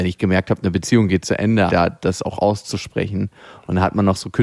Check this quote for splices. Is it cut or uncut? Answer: cut